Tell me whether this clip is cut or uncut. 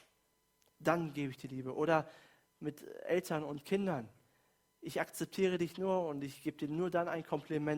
uncut